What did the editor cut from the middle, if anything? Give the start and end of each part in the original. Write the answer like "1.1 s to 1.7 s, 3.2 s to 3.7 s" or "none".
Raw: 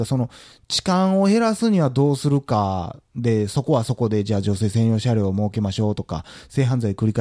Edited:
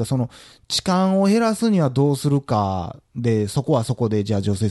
none